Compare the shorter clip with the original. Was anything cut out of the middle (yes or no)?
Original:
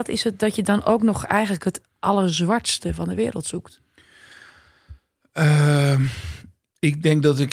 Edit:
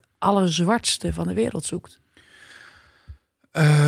no